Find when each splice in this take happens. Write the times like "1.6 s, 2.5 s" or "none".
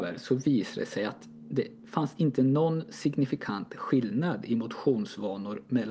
none